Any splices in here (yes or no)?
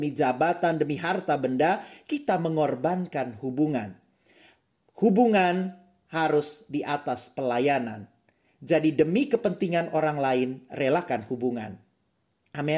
no